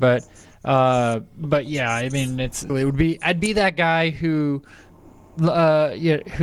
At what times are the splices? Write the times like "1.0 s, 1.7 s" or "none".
2.7 s

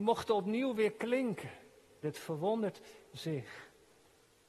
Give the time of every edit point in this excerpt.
2.0 s

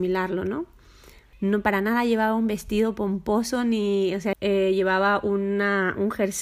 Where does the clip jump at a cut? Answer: 1.3 s, 4.3 s

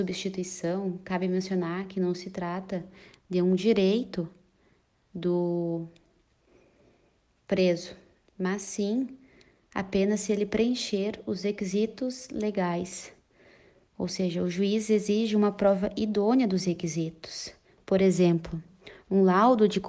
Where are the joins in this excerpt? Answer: none

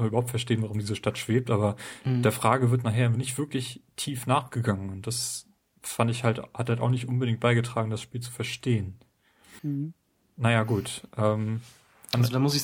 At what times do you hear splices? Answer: 9.6 s

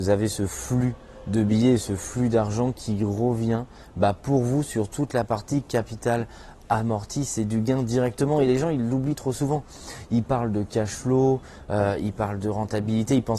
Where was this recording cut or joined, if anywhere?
none

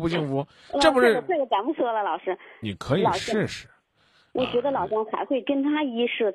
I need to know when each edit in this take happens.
2.6 s

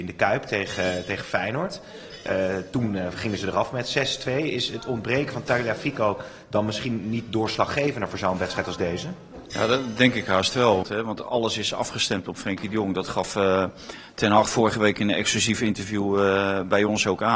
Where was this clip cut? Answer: 10.8 s

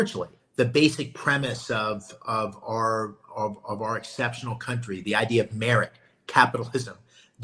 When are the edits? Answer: none

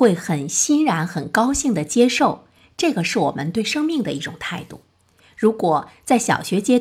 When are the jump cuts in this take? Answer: none

